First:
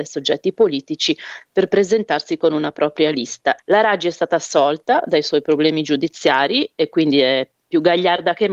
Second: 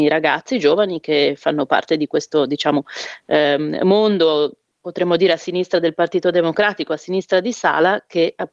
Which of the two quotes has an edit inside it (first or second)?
first